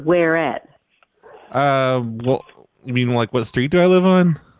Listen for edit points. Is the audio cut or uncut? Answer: uncut